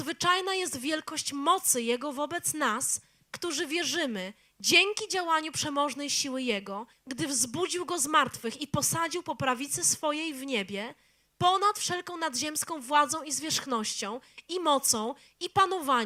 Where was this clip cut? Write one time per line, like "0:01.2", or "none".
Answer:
0:06.9